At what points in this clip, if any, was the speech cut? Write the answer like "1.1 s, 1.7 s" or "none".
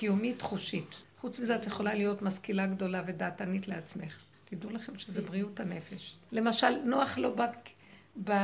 1.0 s, 4.3 s, 6.3 s